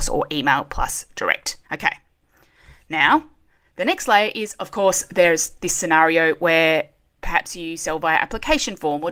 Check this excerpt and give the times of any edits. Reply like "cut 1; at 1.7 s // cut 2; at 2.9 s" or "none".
cut 1; at 1.6 s